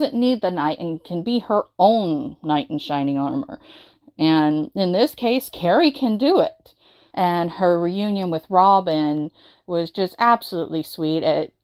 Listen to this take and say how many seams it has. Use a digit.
1